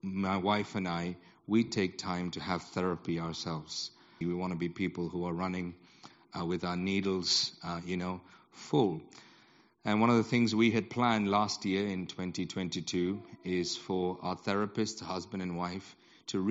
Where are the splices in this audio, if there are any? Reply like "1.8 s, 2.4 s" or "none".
4.2 s